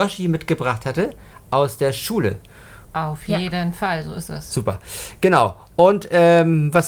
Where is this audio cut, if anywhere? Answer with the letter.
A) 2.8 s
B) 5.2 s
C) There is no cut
A